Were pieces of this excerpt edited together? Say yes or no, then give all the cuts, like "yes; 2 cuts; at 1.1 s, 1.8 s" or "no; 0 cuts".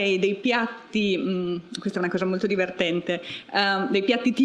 no; 0 cuts